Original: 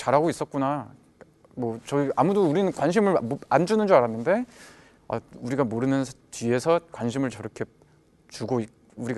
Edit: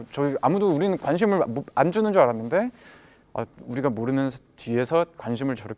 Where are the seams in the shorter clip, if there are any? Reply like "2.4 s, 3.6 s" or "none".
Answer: none